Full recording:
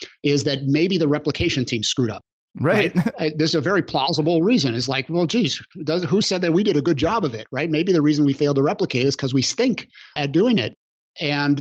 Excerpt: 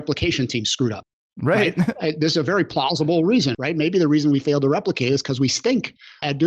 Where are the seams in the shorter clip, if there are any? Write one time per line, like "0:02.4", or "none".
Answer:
0:03.5